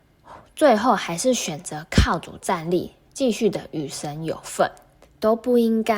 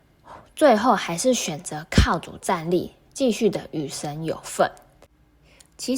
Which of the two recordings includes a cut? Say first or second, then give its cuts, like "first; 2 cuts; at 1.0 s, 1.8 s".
first; 1 cut; at 5.0 s